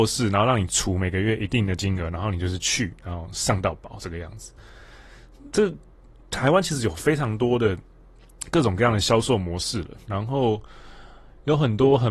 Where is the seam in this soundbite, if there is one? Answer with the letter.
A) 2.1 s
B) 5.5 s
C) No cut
C